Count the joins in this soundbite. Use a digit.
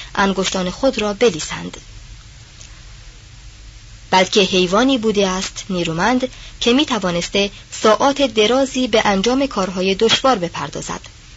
1